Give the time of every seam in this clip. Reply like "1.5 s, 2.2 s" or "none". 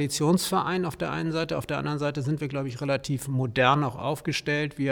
none